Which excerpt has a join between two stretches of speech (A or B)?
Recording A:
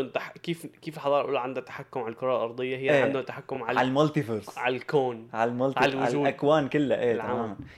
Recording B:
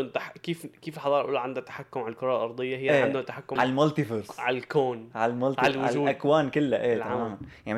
B